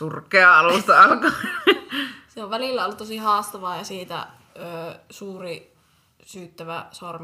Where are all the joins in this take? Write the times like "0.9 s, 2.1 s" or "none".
none

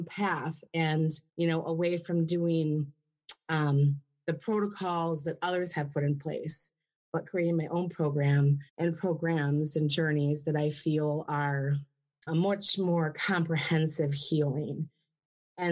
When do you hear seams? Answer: 1.3 s, 8.7 s, 12.3 s

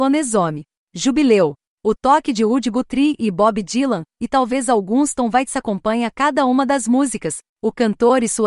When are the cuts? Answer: 7.5 s

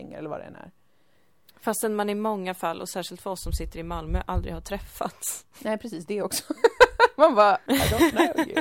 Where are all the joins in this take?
7.7 s

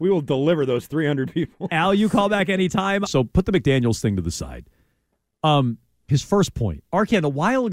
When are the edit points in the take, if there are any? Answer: 3.1 s

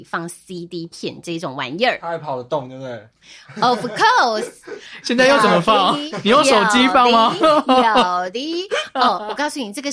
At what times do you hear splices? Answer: 5.0 s

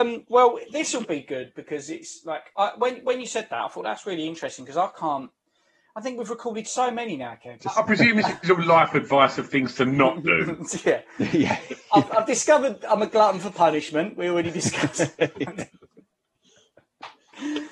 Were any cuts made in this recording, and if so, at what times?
7.6 s

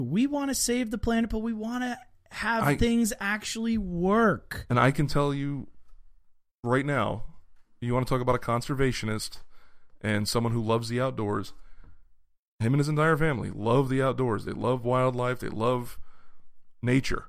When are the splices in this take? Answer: none

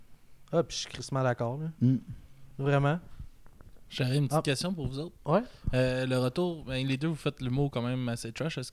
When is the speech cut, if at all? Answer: none

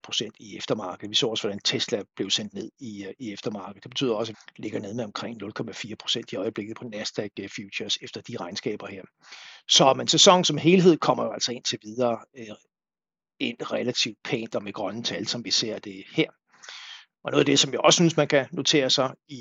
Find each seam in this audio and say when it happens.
4.3 s

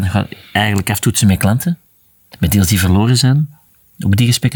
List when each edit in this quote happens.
2.3 s

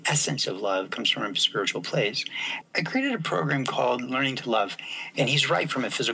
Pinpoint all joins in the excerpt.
2.6 s, 5.1 s

